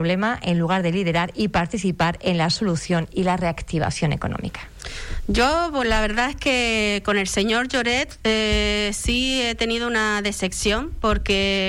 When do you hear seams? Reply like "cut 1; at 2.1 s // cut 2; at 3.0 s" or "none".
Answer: none